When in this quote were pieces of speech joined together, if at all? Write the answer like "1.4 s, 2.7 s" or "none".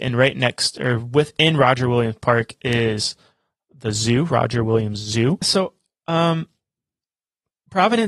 5.4 s